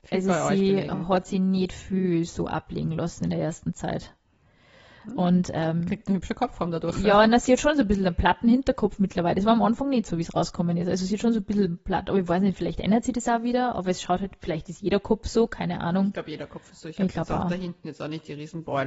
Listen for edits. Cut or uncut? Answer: uncut